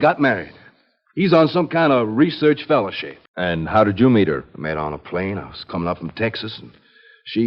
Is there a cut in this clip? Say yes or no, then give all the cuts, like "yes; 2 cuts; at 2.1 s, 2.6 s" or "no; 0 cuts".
yes; 1 cut; at 3.3 s